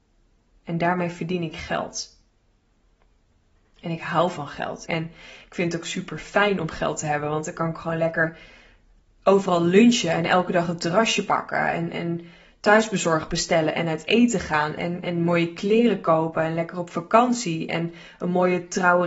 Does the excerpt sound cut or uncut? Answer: cut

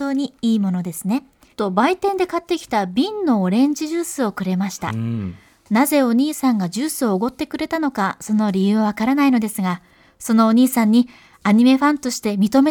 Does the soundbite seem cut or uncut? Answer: cut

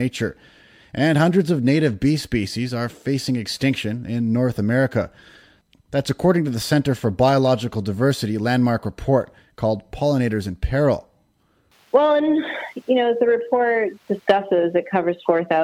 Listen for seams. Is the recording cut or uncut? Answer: uncut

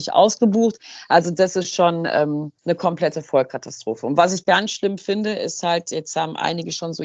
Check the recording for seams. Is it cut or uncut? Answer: cut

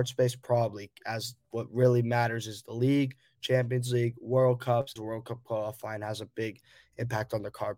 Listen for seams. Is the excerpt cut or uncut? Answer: cut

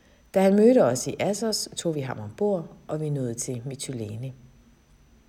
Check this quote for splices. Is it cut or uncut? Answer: uncut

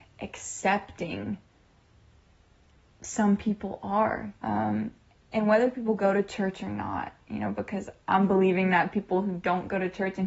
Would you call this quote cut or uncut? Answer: cut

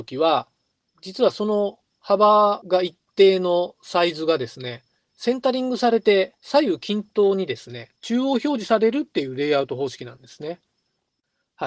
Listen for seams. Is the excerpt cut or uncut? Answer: cut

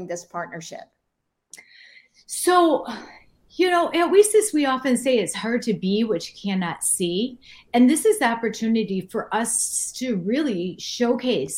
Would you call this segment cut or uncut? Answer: uncut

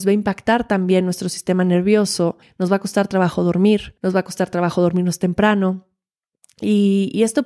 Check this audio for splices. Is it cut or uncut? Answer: cut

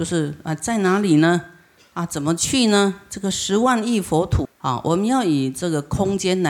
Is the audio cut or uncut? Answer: cut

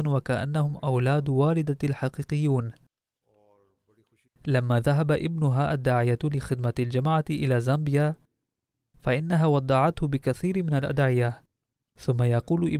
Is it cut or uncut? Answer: cut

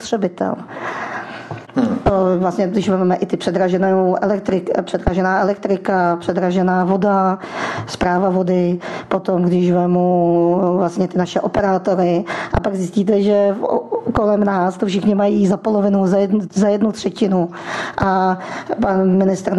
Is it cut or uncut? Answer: uncut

